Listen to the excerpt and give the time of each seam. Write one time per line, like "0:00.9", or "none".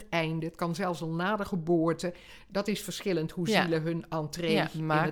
none